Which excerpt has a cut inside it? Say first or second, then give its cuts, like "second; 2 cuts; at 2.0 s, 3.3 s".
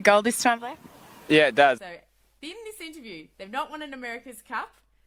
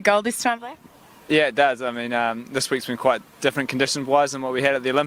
first; 2 cuts; at 1.8 s, 3.4 s